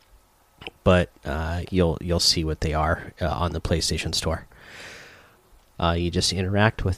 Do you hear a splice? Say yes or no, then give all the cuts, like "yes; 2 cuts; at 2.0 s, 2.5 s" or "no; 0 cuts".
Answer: yes; 2 cuts; at 1.7 s, 5.7 s